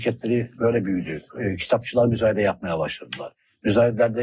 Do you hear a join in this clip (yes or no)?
yes